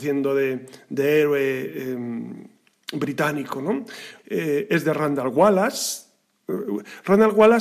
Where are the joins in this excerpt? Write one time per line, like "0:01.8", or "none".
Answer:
0:04.2